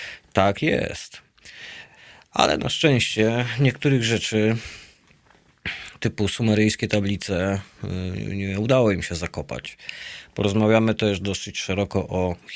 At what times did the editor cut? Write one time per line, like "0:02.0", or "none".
none